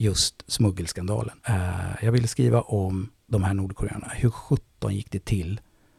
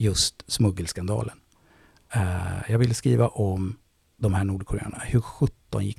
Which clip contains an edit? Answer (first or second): first